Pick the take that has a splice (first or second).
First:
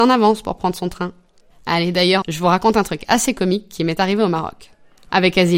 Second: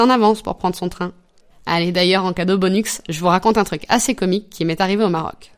first